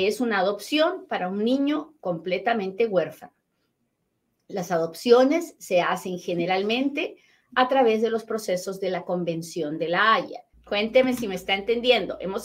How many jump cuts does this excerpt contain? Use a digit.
1